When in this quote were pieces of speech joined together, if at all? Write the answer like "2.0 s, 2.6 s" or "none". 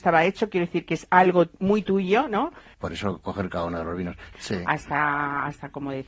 2.7 s, 4.3 s